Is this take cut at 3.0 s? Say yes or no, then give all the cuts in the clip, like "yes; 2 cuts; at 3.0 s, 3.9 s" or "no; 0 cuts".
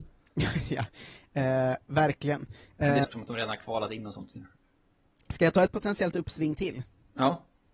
yes; 1 cut; at 3.0 s